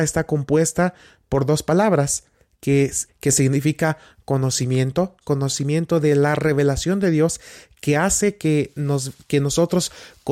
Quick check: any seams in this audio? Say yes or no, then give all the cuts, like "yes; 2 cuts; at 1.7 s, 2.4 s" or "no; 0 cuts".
yes; 2 cuts; at 3.1 s, 5.2 s